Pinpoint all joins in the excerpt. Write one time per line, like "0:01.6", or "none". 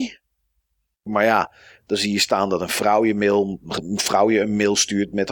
0:01.1